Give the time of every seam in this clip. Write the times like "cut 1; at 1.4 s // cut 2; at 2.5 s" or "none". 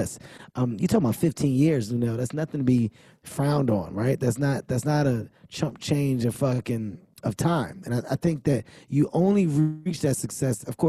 cut 1; at 7.8 s